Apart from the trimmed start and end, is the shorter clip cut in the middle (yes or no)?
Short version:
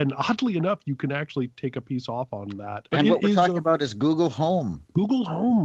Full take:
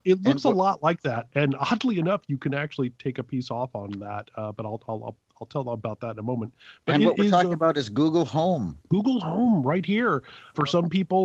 yes